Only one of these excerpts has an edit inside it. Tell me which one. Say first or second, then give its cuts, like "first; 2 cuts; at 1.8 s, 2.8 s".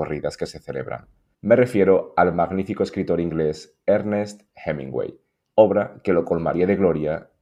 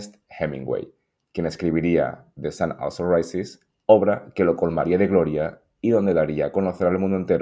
first; 2 cuts; at 1.3 s, 5.5 s